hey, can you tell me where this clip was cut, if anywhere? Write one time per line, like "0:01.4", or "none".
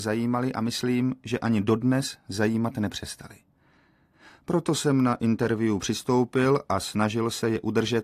none